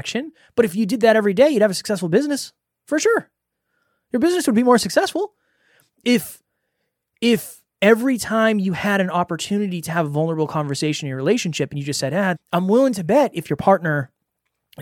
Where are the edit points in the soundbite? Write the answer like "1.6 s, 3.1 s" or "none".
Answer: 12.4 s